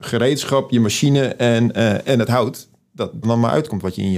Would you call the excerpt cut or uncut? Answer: cut